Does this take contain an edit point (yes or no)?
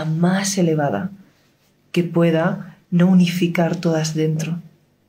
no